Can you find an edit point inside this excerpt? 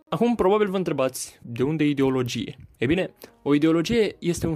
no; 0 cuts

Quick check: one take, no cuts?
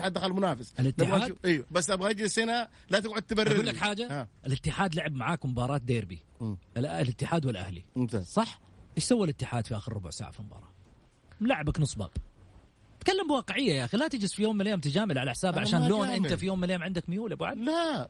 no; 1 cut; at 8.9 s

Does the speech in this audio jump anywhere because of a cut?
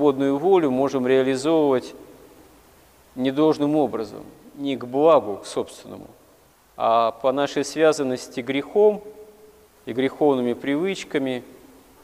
no; 0 cuts

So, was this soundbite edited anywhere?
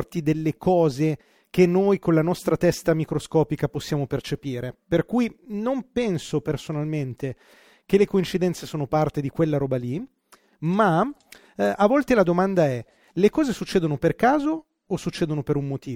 no; 0 cuts

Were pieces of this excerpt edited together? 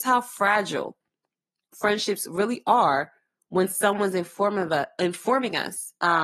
no; 0 cuts

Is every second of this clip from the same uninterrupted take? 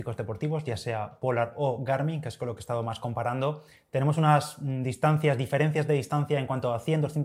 yes; 0 cuts

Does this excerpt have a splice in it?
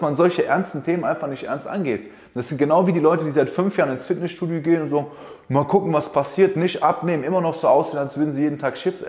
no; 0 cuts

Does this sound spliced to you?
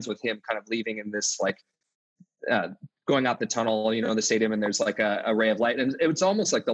no; 0 cuts

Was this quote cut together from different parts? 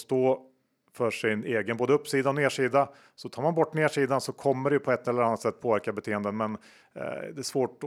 no; 0 cuts

